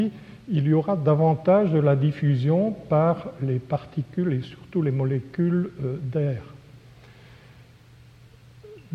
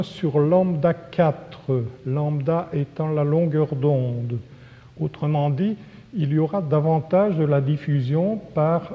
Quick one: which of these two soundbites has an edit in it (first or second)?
second